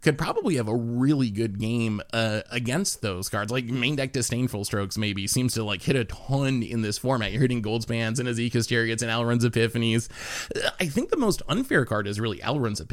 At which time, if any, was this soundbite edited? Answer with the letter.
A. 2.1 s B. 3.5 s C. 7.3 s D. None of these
D